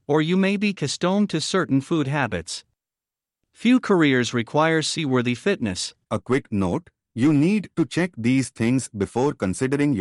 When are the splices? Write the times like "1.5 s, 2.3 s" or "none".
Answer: 6.0 s